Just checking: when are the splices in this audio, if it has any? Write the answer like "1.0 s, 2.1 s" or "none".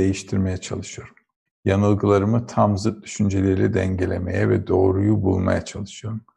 1.5 s